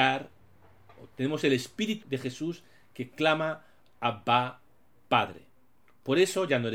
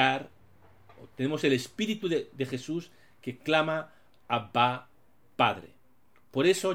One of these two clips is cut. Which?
first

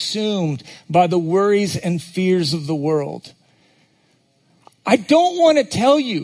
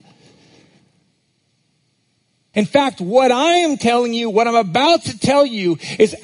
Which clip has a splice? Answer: second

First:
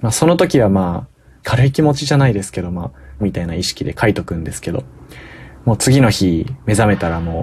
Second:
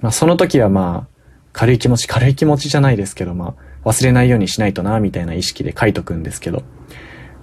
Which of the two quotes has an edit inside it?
first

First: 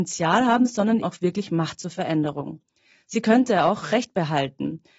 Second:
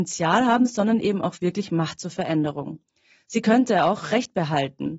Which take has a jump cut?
first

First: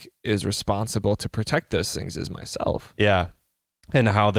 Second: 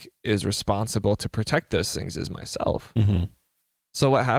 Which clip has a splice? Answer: first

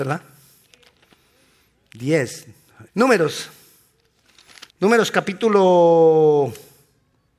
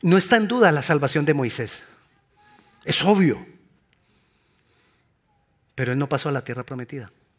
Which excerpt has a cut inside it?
first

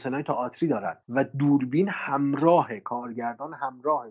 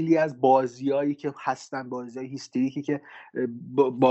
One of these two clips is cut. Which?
first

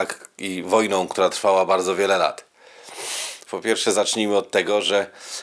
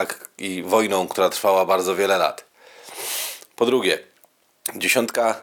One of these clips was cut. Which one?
first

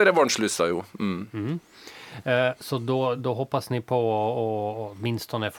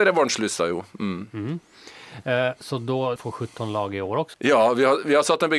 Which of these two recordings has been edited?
second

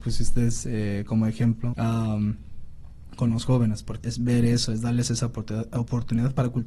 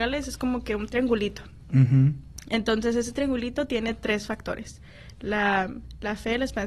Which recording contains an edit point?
first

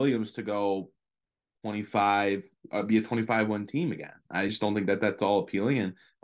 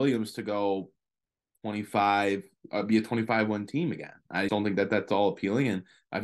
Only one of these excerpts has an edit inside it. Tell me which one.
second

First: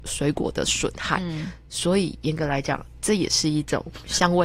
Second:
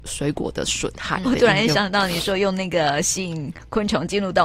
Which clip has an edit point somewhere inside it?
second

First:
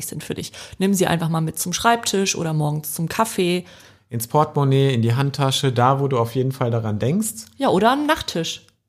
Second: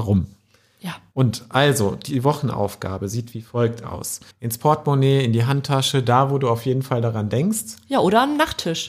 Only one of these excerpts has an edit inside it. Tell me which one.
second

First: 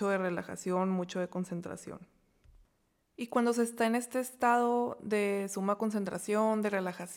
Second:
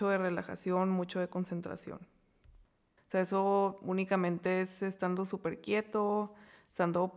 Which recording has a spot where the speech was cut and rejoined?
second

